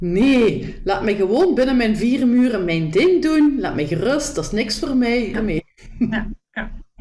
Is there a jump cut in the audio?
yes; 1 cut; at 5.3 s

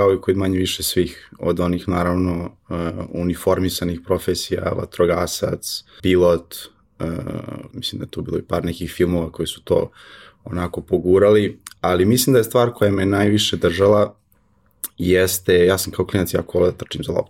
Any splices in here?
yes; 2 cuts; at 6.0 s, 7.7 s

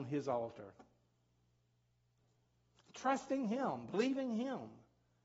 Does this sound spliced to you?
no; 0 cuts

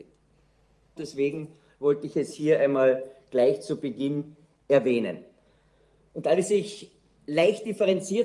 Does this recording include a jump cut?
yes; 1 cut; at 1.0 s

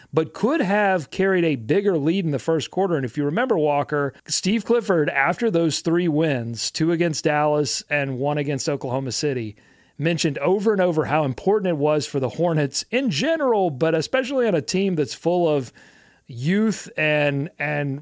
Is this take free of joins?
no; 1 cut; at 4.2 s

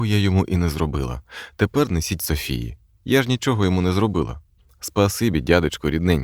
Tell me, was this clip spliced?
no; 0 cuts

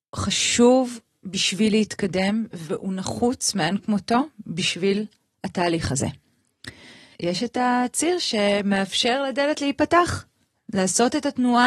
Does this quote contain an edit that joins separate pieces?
yes; 1 cut; at 7.1 s

